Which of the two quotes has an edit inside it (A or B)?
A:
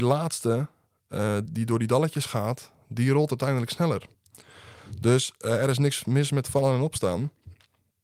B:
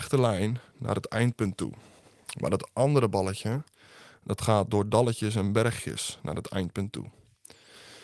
A